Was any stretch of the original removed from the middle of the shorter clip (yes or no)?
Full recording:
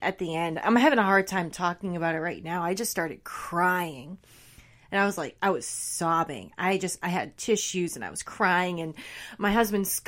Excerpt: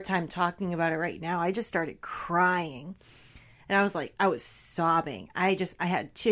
no